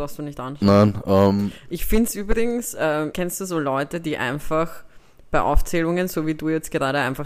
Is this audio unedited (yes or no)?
no